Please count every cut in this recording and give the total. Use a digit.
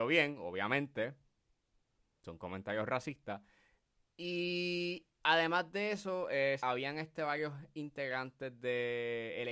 1